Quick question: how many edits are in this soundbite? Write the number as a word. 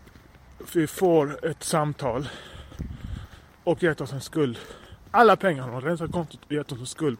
one